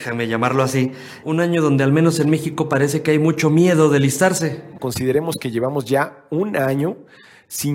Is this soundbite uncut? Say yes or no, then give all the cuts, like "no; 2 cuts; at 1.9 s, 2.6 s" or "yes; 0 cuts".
no; 2 cuts; at 1.2 s, 4.8 s